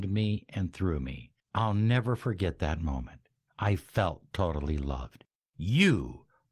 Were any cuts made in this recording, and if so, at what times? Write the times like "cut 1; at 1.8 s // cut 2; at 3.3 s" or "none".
cut 1; at 1.4 s